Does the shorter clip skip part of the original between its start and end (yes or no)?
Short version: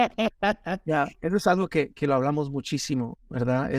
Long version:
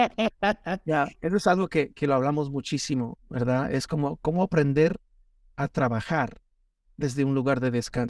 no